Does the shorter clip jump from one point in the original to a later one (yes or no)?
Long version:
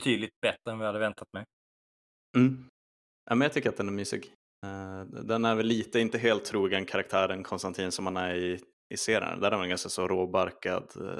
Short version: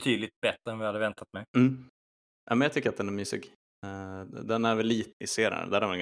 yes